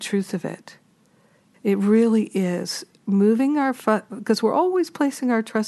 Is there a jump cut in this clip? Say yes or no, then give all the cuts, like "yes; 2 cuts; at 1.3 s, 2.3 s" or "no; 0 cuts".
yes; 1 cut; at 1.5 s